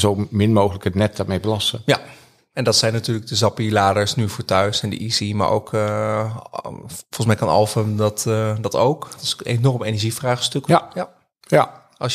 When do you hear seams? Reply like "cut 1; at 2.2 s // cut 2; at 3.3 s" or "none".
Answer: cut 1; at 9.1 s // cut 2; at 10.7 s